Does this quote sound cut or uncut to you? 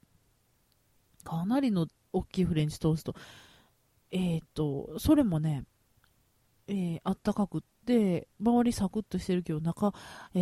uncut